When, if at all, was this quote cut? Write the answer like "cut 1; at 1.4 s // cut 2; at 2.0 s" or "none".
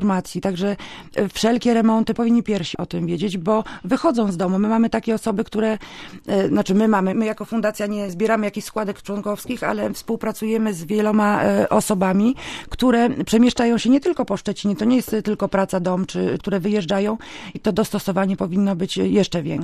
cut 1; at 7.1 s // cut 2; at 16.4 s // cut 3; at 17.5 s